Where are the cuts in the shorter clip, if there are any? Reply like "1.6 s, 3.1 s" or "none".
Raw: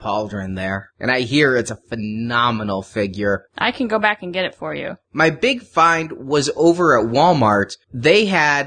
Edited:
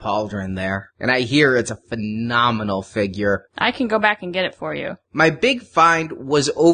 none